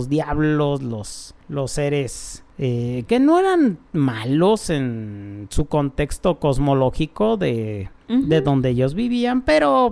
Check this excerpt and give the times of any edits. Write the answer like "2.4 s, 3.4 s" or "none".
3.1 s